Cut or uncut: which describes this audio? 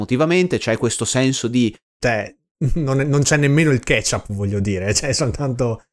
cut